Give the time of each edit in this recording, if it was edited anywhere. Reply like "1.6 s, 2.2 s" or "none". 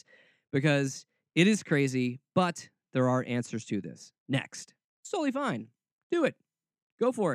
4.9 s